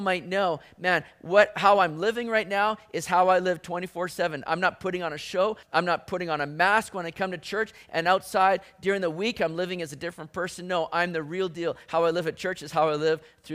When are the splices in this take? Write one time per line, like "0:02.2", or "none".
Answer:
0:05.6